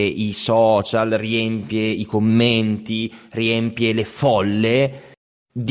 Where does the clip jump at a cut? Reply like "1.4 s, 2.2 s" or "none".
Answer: none